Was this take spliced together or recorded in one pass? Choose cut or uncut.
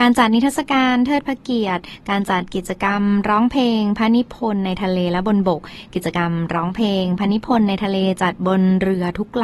uncut